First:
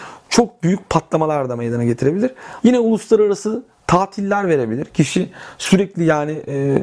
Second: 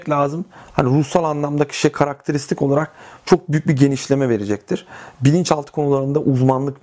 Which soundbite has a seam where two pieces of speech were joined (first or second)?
first